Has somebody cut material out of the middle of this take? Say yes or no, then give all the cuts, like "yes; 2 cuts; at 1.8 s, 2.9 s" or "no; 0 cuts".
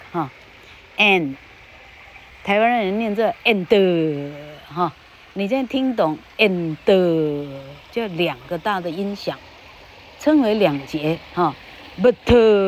no; 0 cuts